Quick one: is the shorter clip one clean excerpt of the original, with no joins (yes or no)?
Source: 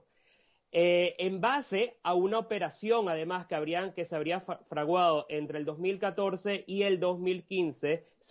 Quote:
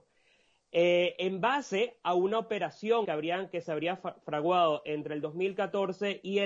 no